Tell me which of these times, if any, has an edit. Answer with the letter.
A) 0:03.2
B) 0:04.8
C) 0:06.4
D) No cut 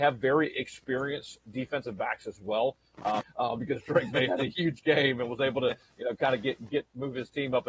A